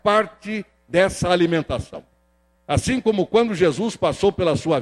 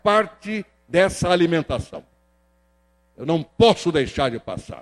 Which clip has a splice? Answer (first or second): first